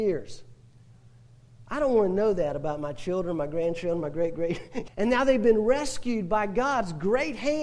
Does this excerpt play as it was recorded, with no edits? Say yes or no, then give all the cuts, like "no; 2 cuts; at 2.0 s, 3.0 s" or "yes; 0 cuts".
no; 1 cut; at 4.9 s